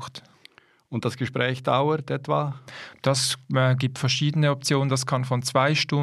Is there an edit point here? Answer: no; 0 cuts

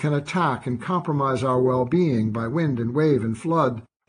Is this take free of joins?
yes; 0 cuts

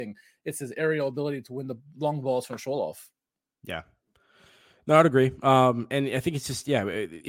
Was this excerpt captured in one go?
yes; 0 cuts

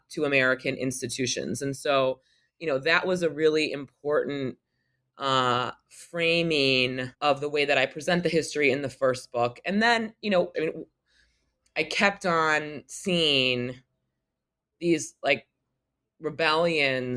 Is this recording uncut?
no; 2 cuts; at 7.1 s, 10.5 s

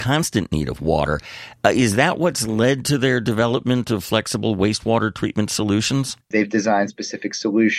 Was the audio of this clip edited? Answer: yes; 1 cut; at 6.2 s

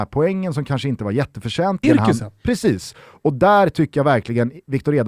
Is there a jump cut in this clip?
yes; 1 cut; at 1.8 s

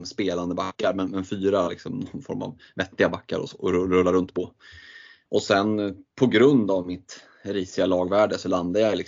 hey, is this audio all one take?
no; 1 cut; at 5.3 s

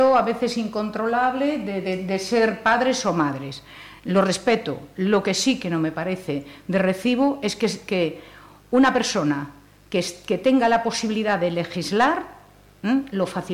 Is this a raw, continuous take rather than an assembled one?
yes; 0 cuts

